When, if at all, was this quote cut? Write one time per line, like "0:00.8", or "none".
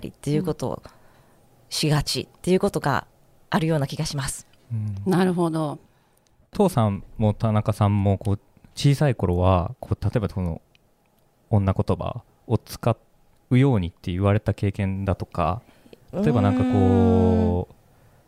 none